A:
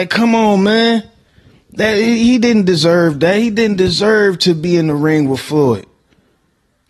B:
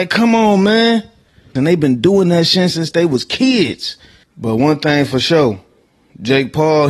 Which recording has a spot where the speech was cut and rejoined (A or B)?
B